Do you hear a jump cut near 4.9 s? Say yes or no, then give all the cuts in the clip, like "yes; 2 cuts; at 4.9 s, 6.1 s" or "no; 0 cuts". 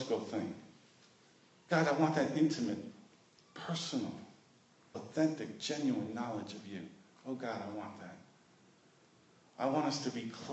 yes; 1 cut; at 4.9 s